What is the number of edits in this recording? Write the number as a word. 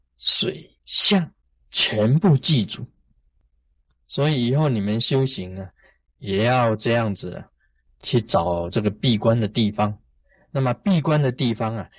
zero